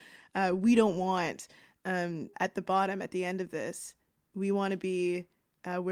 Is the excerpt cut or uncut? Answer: cut